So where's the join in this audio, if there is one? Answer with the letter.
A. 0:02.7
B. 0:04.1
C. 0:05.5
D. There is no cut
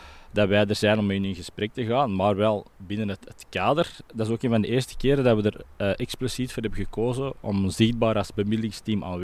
A